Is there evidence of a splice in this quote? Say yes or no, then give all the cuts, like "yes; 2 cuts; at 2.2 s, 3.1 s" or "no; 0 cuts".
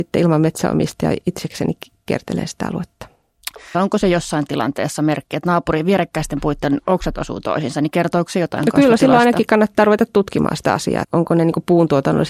yes; 2 cuts; at 3.7 s, 11.0 s